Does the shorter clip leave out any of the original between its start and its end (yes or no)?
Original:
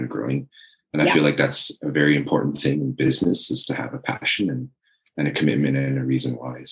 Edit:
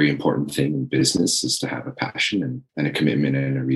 yes